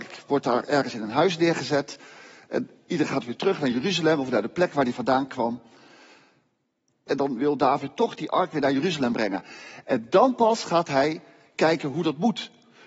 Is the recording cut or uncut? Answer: cut